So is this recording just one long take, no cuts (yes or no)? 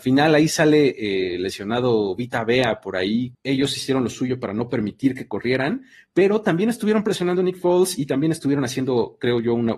no